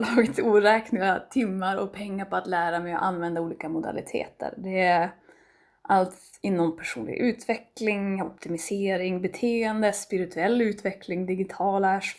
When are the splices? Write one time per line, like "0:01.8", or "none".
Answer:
none